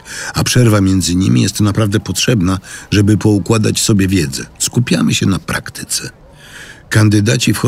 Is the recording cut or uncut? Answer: cut